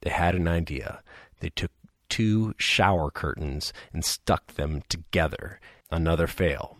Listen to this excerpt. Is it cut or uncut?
cut